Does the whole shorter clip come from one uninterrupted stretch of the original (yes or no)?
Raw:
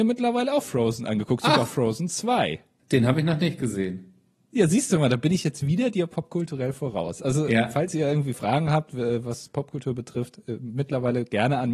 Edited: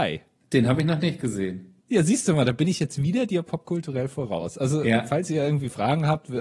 no